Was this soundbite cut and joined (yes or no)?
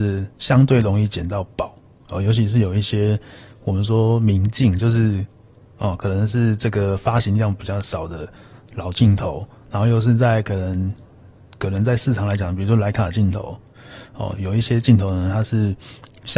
yes